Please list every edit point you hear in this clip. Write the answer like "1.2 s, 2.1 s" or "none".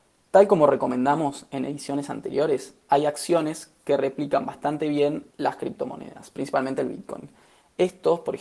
5.3 s